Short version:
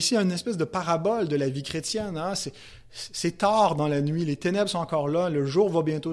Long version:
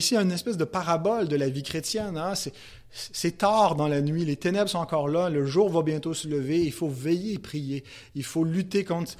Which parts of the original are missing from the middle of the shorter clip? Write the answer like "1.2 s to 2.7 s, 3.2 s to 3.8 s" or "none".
none